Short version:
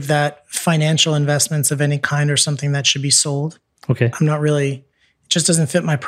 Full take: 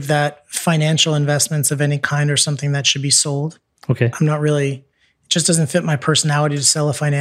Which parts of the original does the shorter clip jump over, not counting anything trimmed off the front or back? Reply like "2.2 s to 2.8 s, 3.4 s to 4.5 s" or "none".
none